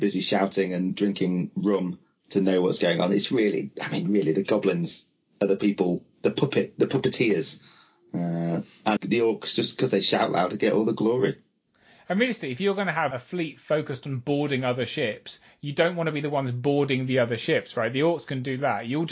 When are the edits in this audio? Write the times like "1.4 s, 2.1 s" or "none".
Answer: 9.0 s, 13.1 s